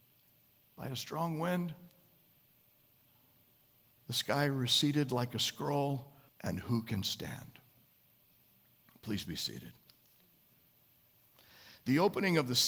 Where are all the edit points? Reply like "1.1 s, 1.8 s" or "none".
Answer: 6.3 s